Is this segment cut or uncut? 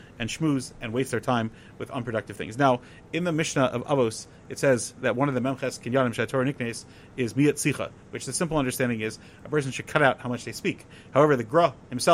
uncut